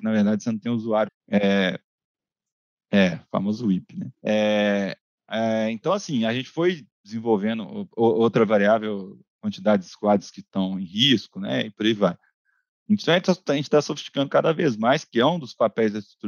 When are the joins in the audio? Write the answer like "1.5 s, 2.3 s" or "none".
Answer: 1.1 s, 4.1 s